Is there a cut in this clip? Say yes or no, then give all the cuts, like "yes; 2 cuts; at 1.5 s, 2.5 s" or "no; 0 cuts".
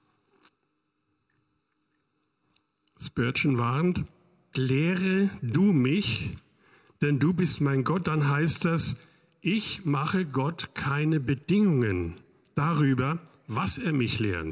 yes; 1 cut; at 4.5 s